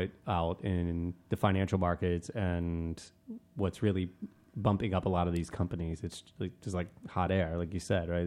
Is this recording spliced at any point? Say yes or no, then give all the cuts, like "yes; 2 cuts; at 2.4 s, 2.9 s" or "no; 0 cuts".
no; 0 cuts